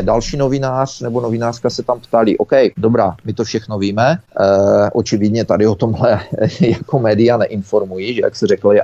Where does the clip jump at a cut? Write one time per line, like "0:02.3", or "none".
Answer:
none